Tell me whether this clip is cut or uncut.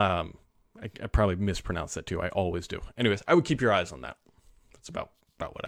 uncut